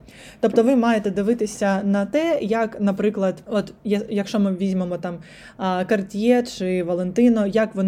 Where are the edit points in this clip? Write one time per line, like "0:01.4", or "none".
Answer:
0:03.4